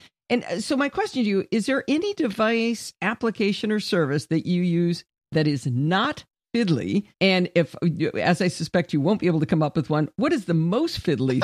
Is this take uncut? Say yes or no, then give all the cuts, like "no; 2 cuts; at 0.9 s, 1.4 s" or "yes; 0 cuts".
no; 1 cut; at 7.1 s